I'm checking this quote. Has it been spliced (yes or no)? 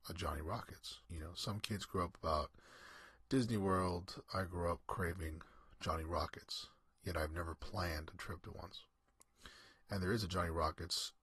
yes